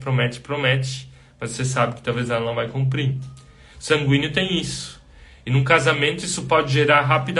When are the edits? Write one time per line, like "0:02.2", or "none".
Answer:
none